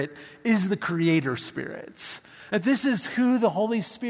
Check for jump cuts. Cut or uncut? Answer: uncut